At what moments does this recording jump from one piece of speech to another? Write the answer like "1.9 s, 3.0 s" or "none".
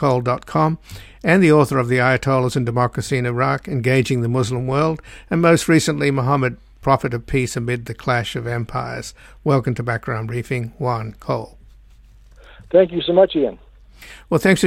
none